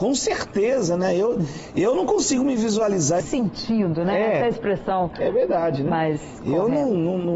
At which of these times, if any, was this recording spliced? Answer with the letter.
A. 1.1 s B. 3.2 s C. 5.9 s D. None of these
B